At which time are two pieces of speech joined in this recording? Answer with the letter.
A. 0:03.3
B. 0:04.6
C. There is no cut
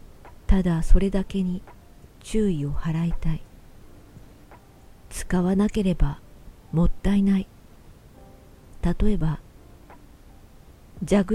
C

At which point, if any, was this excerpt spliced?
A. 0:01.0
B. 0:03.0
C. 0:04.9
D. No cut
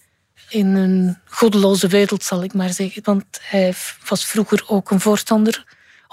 B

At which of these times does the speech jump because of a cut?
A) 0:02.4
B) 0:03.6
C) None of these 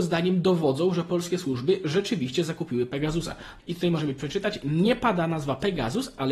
B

